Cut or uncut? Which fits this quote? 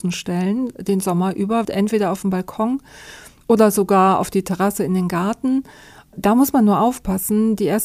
cut